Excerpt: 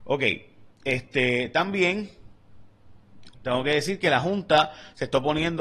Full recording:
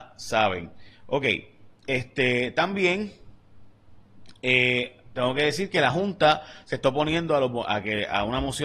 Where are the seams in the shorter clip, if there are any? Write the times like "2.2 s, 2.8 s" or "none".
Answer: 3.3 s